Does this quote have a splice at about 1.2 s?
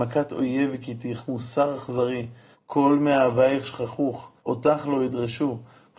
no; 2 cuts; at 2.5 s, 4.4 s

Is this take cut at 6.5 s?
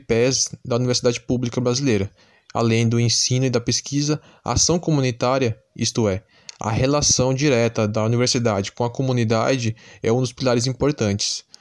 no; 0 cuts

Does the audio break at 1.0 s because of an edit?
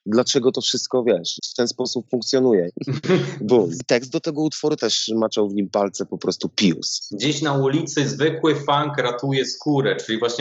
no; 3 cuts; at 2.7 s, 4.8 s, 7.1 s

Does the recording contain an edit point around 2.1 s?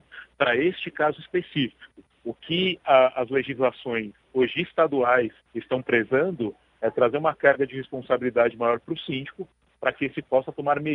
yes; 2 cuts; at 2.1 s, 5.4 s

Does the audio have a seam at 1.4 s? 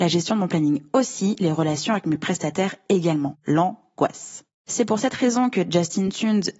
no; 0 cuts

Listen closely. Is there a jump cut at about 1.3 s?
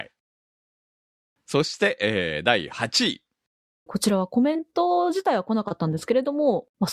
no; 1 cut; at 3.9 s

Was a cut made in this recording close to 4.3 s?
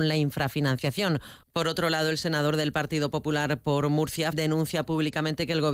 yes; 2 cuts; at 1.4 s, 4.3 s

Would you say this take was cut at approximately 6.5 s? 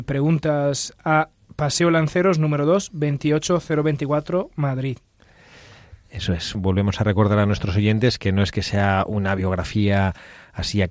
yes; 1 cut; at 6.5 s

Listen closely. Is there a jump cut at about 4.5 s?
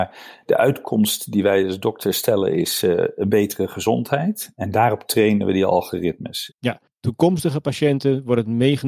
no; 1 cut; at 6.5 s

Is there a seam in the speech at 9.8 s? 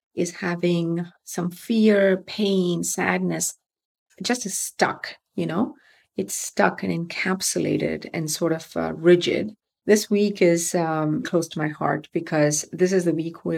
yes; 3 cuts; at 4.1 s, 9.8 s, 11.2 s

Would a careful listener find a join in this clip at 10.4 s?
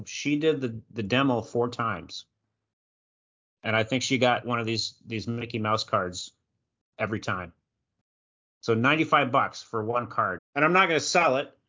yes; 1 cut; at 10.4 s

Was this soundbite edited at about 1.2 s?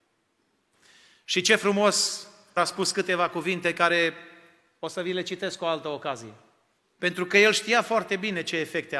no; 2 cuts; at 2.6 s, 6.8 s

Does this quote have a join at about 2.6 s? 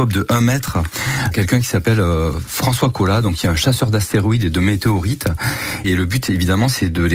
no; 2 cuts; at 1.3 s, 5.8 s

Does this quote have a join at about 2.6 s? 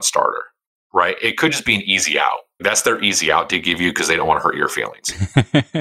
yes; 1 cut; at 2.6 s

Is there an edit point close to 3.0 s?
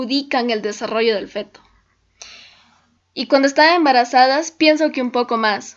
yes; 1 cut; at 3.0 s

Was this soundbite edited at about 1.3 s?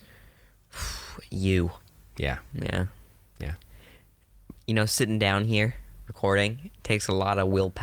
no; 0 cuts

